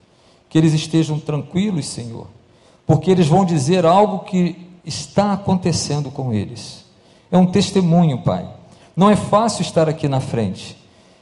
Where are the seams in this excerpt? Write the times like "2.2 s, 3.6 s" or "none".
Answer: none